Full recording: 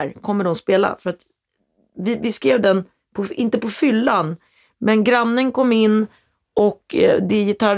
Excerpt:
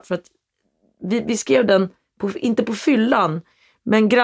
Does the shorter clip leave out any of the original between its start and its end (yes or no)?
no